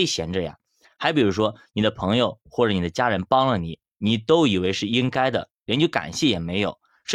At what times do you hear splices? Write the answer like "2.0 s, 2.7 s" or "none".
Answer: none